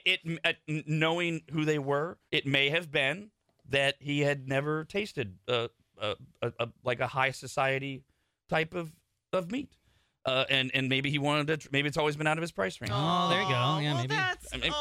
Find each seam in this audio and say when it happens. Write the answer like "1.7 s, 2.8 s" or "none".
2.3 s